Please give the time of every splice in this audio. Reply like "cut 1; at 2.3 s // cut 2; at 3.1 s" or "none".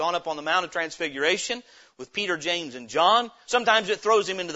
cut 1; at 3.4 s